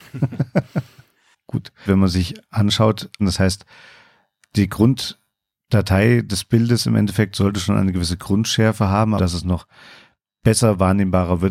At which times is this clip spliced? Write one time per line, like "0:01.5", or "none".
0:01.9
0:03.2
0:09.2